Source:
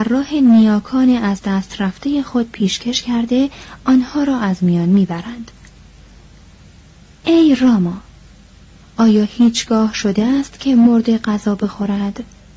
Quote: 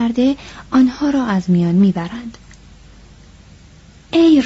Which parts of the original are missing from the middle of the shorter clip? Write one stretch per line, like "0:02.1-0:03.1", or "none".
none